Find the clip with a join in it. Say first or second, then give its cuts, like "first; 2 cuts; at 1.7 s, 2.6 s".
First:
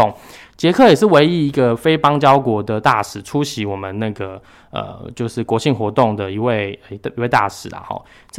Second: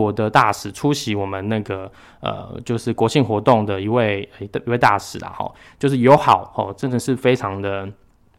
second; 1 cut; at 5.7 s